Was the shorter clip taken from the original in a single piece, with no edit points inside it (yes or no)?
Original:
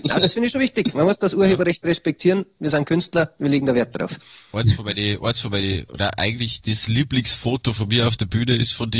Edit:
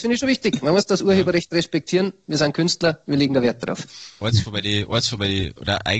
yes